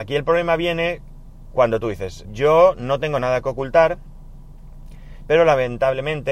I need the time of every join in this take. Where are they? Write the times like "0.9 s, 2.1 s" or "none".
2.2 s, 5.2 s